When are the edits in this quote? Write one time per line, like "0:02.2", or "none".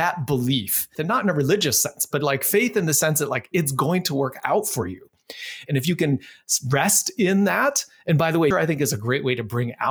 0:01.0
0:05.7
0:08.5